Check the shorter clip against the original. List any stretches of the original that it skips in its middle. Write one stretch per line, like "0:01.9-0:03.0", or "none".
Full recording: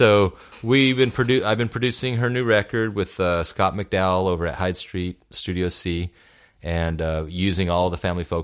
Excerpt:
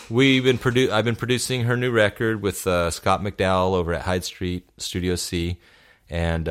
none